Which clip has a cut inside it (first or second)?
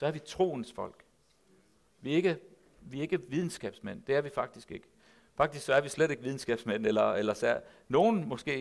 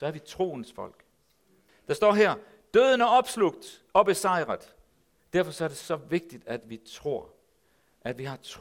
second